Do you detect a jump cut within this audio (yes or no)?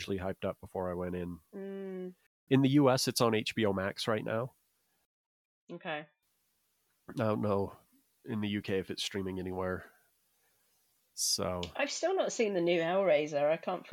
yes